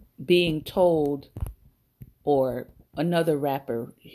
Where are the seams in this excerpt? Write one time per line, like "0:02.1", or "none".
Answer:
0:02.1